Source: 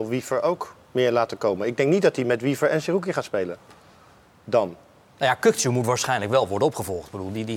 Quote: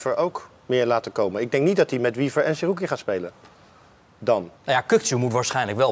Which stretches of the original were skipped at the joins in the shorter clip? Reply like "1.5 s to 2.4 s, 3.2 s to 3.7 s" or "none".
4.8 s to 5.1 s